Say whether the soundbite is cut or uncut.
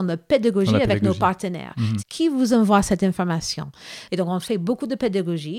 cut